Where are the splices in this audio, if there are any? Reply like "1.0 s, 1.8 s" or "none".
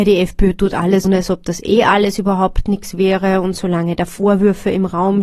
1.0 s